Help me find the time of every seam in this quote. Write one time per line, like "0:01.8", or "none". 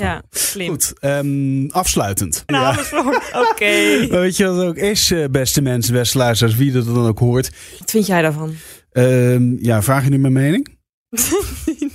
0:02.5
0:07.8